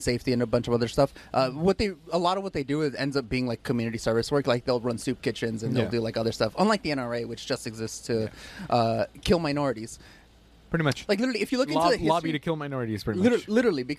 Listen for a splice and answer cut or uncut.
uncut